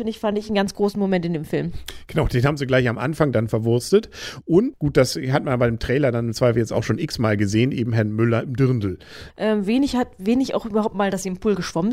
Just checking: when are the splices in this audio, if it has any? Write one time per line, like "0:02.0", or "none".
0:04.7
0:09.3